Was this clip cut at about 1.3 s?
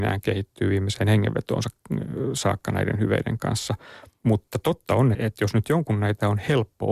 no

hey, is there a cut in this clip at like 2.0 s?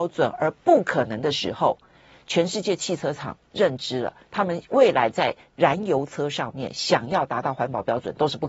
no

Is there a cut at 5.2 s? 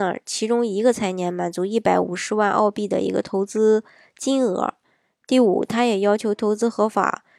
no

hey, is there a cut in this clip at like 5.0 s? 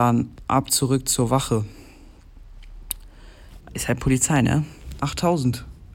yes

